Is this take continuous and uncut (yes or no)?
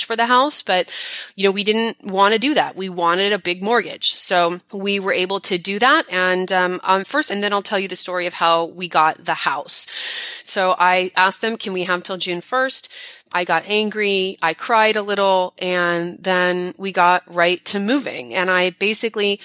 no